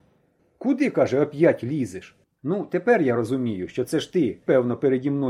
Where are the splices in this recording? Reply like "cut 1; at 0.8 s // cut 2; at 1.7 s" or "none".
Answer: cut 1; at 2.2 s